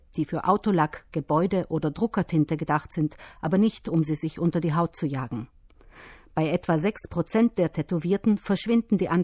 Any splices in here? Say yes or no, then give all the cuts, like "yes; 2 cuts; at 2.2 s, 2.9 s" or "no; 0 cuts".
no; 0 cuts